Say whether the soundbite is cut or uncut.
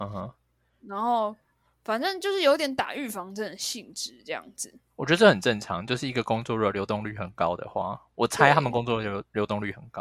uncut